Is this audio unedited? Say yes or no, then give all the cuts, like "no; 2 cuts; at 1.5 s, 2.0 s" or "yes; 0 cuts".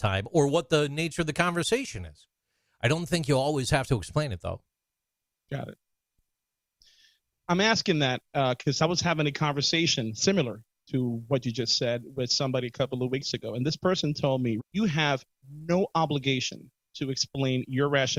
no; 1 cut; at 14.6 s